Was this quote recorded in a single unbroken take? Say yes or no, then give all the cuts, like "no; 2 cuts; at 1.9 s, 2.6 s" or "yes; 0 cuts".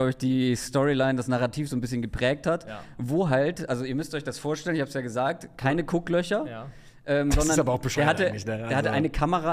yes; 0 cuts